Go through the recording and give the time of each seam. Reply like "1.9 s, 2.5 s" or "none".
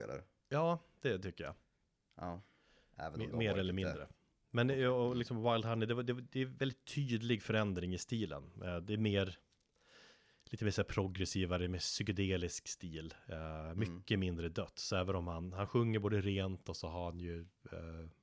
none